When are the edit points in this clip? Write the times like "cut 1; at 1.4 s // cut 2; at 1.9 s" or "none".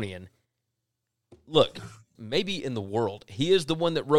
cut 1; at 2.2 s